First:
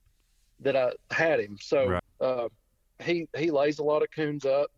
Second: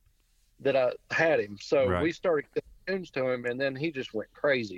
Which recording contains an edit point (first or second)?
first